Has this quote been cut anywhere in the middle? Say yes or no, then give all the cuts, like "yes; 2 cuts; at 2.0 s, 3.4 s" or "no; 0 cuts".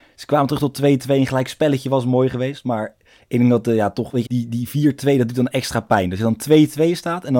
yes; 1 cut; at 4.3 s